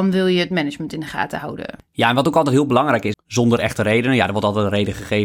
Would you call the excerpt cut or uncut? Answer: cut